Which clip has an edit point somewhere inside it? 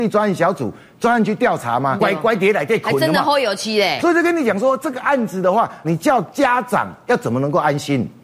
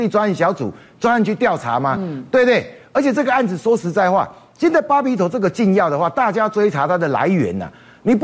first; 3 cuts; at 2.0 s, 4.0 s, 5.8 s

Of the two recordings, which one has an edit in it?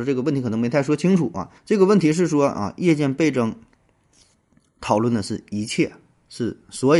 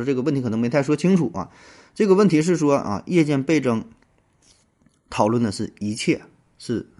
first; 1 cut; at 1.6 s

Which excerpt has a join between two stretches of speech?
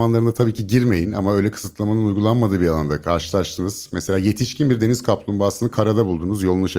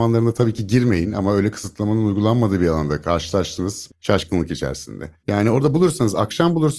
second; 2 cuts; at 3.9 s, 5.2 s

